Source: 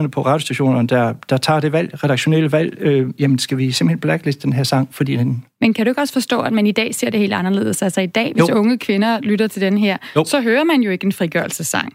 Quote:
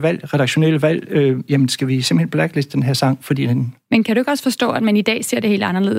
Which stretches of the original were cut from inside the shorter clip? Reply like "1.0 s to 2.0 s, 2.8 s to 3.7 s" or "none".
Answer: none